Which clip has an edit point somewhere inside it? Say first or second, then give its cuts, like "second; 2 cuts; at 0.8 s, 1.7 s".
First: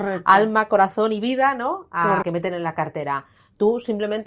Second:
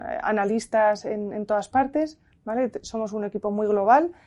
first; 1 cut; at 2.2 s